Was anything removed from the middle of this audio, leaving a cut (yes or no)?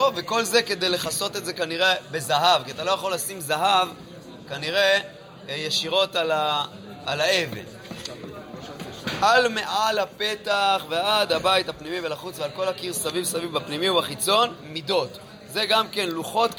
no